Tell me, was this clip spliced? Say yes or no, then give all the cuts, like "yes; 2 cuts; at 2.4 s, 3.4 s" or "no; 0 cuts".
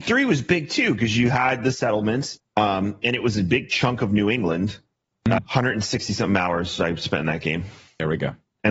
yes; 2 cuts; at 2.4 s, 5.4 s